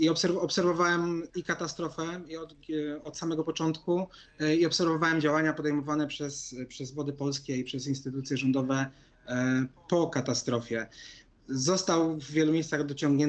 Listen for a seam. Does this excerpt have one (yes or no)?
no